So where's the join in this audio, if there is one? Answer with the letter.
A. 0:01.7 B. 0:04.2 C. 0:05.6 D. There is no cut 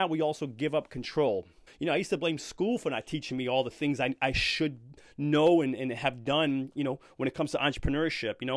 A